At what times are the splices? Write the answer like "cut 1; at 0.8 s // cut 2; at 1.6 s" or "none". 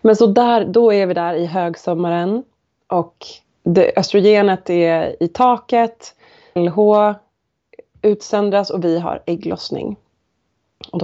cut 1; at 3.4 s // cut 2; at 6.6 s